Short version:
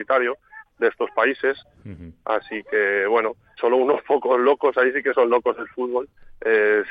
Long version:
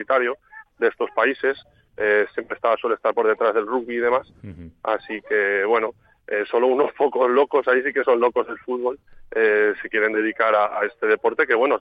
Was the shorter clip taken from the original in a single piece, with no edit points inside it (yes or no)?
no